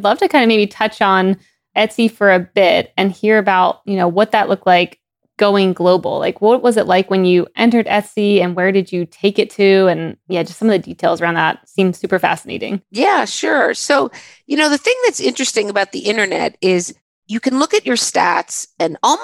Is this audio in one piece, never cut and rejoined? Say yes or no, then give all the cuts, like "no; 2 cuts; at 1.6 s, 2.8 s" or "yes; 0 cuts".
yes; 0 cuts